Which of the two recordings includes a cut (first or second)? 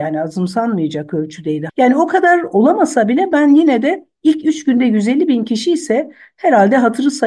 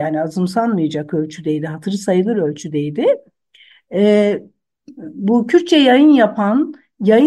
first